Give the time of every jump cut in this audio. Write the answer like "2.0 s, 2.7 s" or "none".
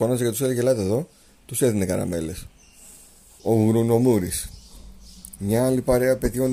3.4 s, 5.4 s

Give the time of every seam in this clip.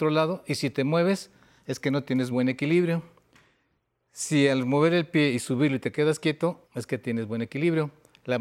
2.3 s, 6.6 s

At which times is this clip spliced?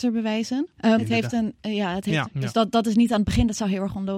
1.0 s, 2.2 s

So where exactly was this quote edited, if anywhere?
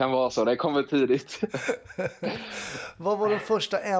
none

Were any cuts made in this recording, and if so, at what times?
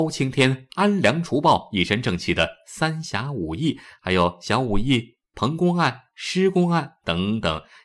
none

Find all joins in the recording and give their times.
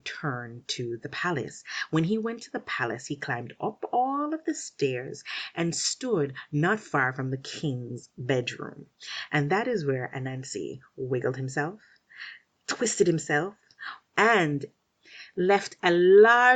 14.0 s

